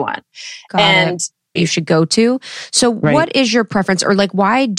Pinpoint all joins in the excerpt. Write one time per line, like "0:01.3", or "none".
0:01.6